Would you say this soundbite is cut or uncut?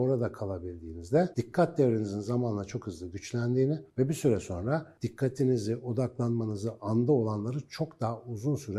cut